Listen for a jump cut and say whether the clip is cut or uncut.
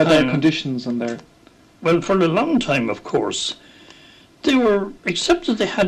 cut